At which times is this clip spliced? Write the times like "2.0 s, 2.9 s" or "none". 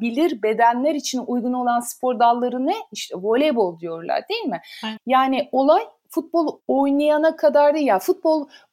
5.0 s